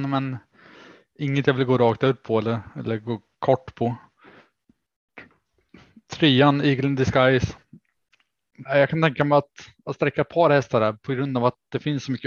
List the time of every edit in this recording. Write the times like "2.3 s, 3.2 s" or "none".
8.7 s